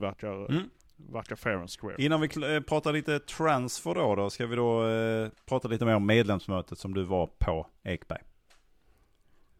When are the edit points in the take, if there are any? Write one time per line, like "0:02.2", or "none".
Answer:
none